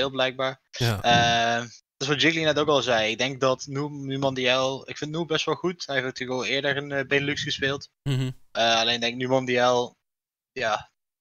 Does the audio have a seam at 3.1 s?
no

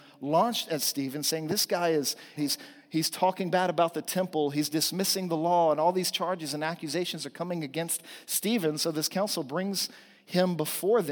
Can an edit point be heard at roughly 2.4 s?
yes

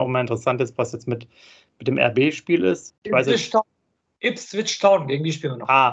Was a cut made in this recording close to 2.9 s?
yes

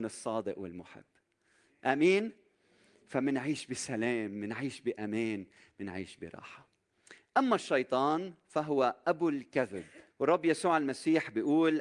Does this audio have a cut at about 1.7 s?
no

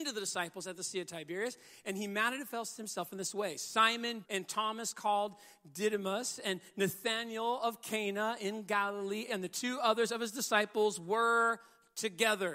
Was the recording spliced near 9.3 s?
yes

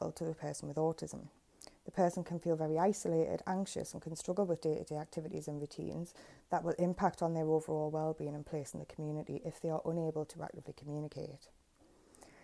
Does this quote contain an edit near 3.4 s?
no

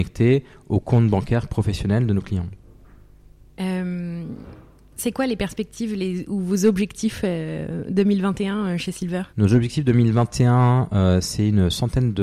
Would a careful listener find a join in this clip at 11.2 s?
no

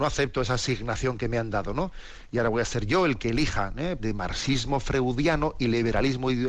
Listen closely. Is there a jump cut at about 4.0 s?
yes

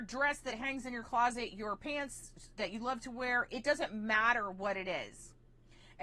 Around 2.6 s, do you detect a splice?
yes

